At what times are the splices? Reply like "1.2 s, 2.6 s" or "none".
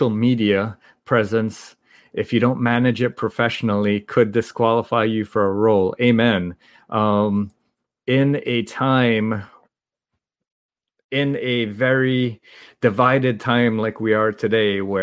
none